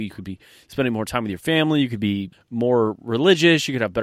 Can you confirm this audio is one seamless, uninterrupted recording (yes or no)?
no